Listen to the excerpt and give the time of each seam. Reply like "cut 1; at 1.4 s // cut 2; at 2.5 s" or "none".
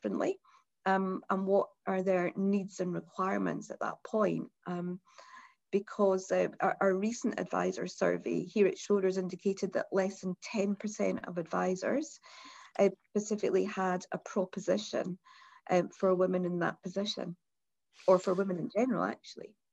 none